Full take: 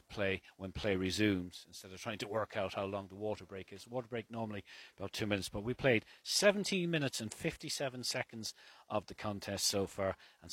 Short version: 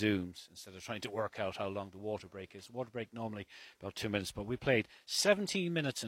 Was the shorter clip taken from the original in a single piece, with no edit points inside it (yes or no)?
yes